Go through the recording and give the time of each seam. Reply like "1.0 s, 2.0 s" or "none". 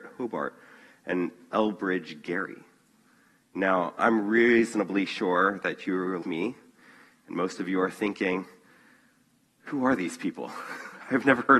6.2 s